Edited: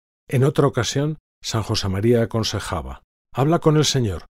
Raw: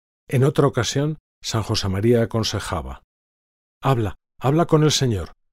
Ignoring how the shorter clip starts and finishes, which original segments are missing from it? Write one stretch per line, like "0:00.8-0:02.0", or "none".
0:03.3-0:04.3